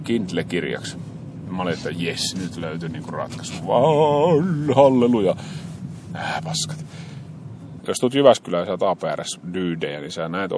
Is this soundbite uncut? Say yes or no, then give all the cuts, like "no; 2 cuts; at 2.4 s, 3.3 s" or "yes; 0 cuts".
no; 1 cut; at 7.8 s